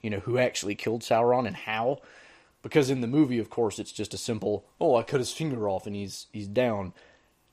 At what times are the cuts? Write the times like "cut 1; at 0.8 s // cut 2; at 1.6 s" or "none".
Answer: none